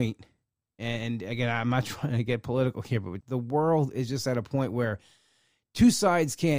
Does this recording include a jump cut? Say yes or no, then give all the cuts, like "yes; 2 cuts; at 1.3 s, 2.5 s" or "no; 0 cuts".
yes; 1 cut; at 3.2 s